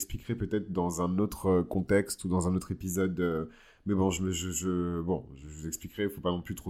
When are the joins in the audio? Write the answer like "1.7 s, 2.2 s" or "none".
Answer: none